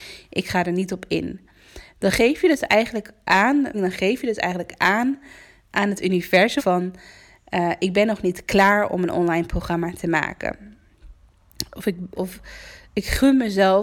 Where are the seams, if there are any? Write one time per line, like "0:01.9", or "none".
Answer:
0:03.7
0:06.6
0:12.1